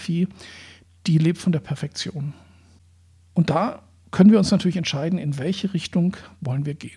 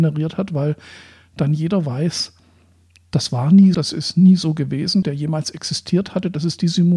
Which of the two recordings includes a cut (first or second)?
second